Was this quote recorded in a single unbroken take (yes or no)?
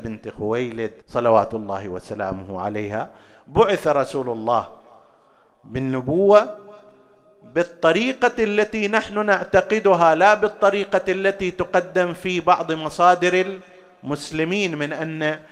no